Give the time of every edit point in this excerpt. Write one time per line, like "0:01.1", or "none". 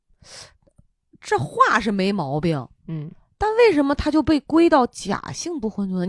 none